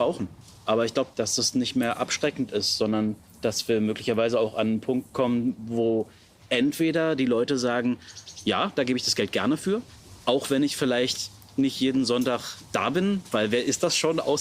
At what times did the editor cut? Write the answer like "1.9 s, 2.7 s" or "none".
1.1 s